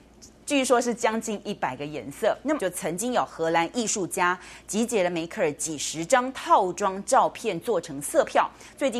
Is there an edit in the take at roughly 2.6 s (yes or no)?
yes